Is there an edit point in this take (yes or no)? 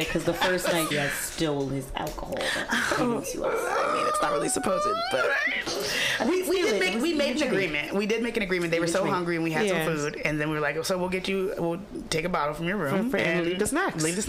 yes